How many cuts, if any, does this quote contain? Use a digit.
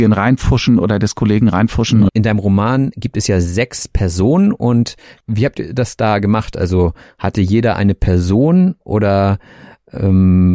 1